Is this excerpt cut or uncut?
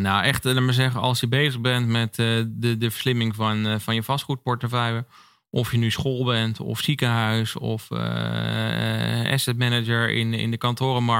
uncut